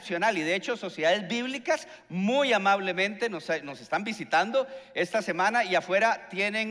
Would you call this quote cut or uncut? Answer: uncut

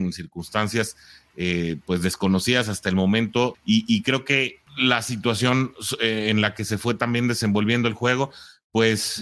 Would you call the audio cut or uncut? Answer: cut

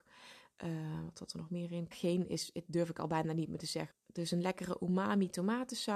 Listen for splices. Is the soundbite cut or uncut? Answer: cut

